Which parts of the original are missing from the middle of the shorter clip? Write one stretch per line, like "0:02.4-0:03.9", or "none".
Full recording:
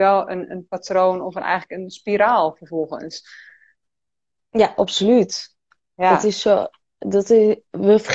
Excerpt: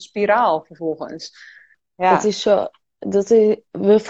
0:03.7-0:05.7